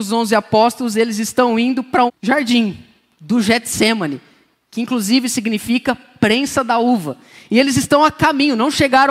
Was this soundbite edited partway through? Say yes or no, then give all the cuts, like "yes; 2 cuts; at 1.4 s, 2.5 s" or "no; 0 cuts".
yes; 1 cut; at 2.1 s